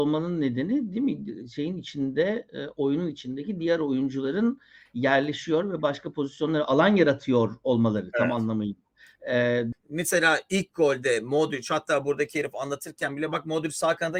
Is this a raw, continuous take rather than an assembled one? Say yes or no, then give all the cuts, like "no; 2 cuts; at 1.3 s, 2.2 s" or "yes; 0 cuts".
no; 1 cut; at 9.7 s